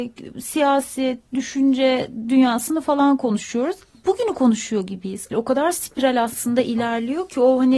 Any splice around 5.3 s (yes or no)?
yes